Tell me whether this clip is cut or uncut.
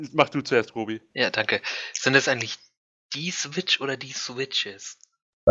uncut